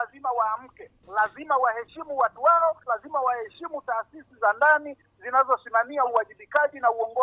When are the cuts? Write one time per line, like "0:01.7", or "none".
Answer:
0:02.9